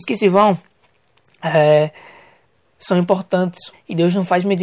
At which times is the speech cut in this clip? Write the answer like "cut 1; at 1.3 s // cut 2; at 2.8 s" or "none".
cut 1; at 3.7 s